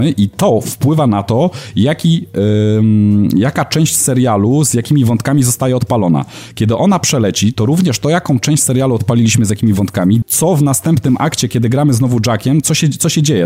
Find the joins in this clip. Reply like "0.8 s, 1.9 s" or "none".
10.2 s